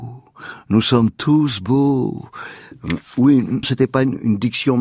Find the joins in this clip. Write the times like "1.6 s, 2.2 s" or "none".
3.6 s